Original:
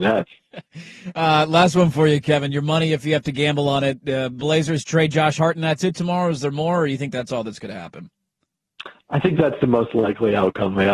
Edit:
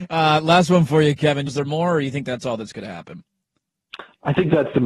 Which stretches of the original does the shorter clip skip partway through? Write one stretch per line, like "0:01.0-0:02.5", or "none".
0:02.5-0:06.3